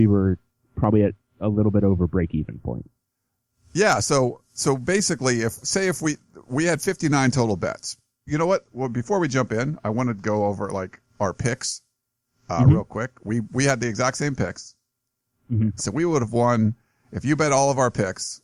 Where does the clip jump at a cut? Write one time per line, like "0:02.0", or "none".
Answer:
0:08.3
0:15.8